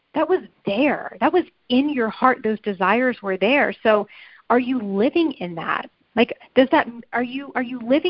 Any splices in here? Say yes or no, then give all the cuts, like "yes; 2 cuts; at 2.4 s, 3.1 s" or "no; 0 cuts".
no; 0 cuts